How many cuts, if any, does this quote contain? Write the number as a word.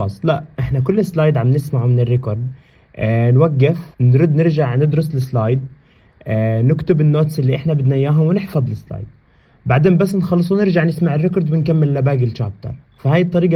one